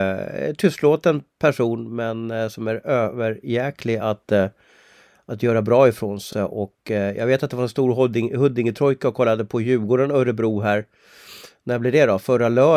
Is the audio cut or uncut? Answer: uncut